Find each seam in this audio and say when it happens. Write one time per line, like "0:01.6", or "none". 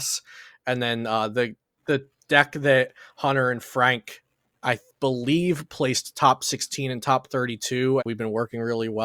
0:08.0